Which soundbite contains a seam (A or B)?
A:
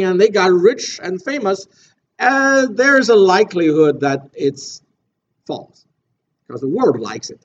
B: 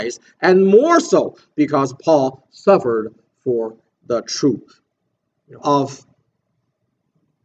B